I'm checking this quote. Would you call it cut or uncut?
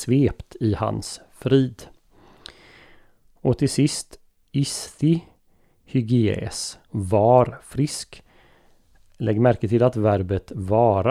uncut